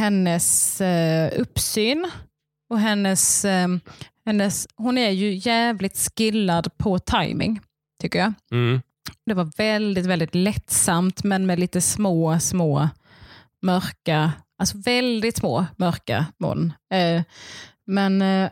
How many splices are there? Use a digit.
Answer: 1